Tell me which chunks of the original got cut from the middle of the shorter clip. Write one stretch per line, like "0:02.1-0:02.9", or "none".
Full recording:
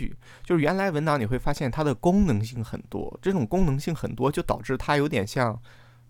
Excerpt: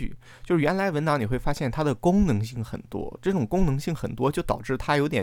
none